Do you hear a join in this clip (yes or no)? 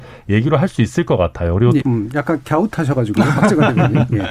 yes